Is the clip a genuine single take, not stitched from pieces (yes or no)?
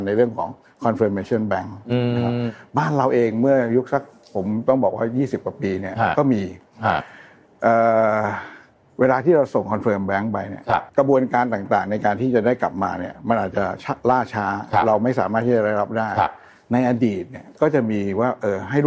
no